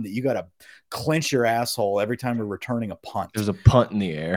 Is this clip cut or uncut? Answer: uncut